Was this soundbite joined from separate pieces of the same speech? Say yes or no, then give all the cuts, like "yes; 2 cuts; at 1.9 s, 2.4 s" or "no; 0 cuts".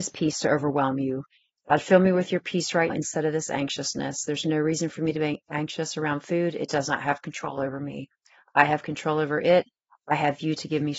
yes; 1 cut; at 2.9 s